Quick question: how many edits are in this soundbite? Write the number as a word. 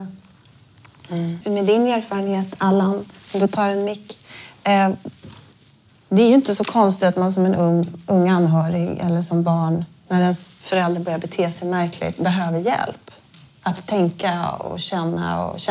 one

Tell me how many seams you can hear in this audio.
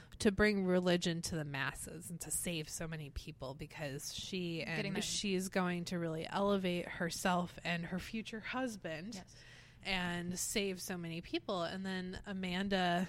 one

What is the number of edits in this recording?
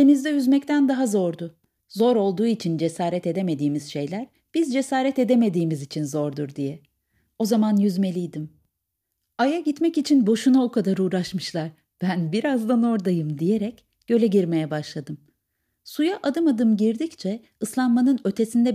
one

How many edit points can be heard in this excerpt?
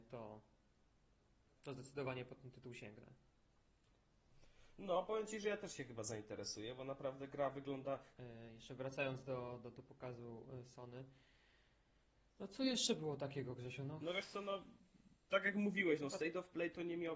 one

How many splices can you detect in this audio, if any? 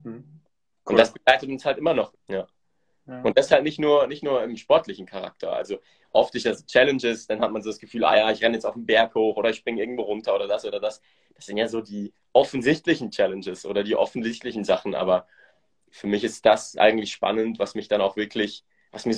one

